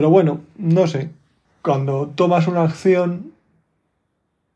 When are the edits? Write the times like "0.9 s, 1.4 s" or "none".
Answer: 1.4 s

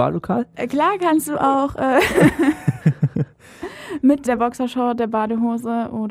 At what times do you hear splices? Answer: 4.3 s

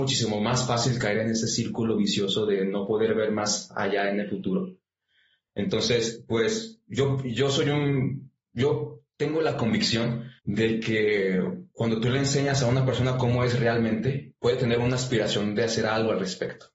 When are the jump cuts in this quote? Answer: 10.4 s, 14.4 s

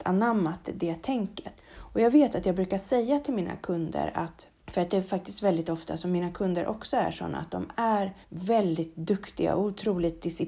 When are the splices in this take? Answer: 1.6 s, 4.6 s, 8.2 s

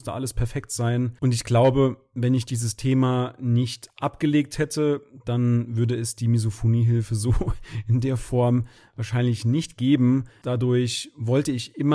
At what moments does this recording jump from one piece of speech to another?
1.2 s, 10.4 s

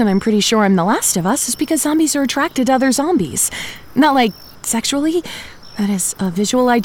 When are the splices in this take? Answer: 4.5 s

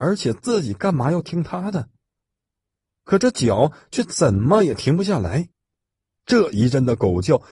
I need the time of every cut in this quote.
6.1 s

